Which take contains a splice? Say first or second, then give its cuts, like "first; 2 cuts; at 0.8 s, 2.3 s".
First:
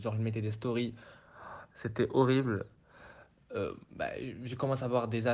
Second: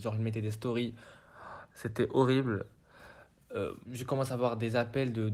second; 1 cut; at 3.8 s